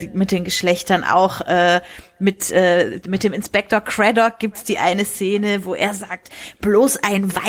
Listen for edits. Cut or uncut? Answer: uncut